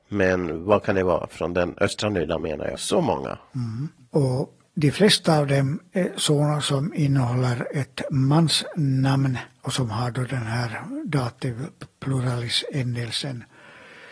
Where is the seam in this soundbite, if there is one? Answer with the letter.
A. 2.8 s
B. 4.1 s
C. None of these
A